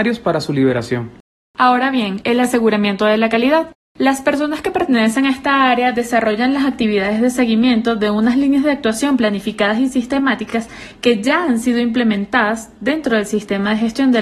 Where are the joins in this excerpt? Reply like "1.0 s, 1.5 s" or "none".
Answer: none